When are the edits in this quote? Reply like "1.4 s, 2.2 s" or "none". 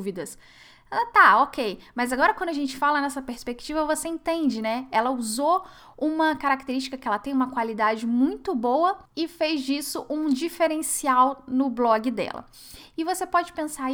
9.1 s